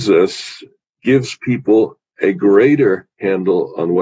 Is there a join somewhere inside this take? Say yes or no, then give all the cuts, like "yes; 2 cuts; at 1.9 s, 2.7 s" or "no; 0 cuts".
no; 0 cuts